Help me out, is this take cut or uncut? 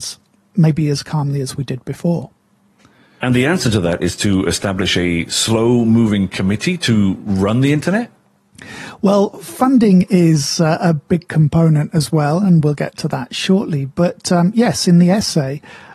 uncut